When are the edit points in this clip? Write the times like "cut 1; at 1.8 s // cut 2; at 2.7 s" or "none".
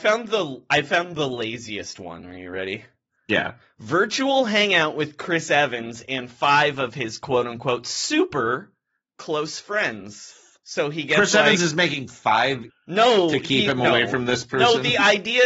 cut 1; at 12.7 s